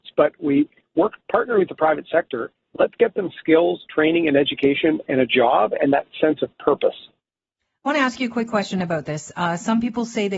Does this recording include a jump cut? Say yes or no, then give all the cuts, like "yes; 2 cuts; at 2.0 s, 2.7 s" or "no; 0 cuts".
no; 0 cuts